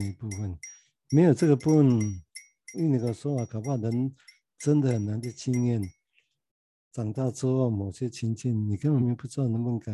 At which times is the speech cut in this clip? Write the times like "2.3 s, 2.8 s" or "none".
2.7 s, 9.0 s